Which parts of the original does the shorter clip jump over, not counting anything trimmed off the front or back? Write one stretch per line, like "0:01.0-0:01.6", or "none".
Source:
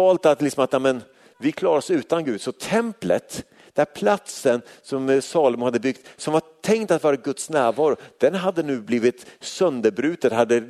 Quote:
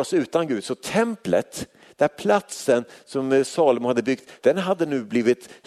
0:06.1-0:08.1